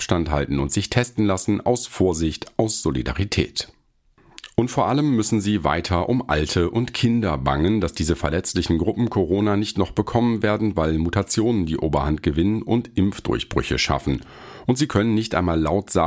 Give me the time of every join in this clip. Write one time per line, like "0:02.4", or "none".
none